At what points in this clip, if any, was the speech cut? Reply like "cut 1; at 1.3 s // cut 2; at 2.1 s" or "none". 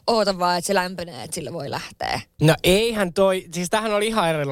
cut 1; at 2.4 s